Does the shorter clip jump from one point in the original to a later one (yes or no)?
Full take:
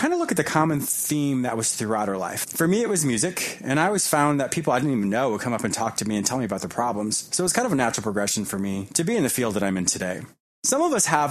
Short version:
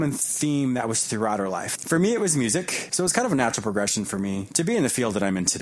yes